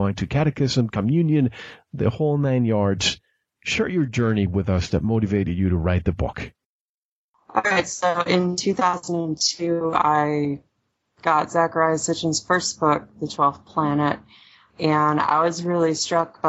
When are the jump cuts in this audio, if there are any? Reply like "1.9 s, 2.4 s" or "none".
none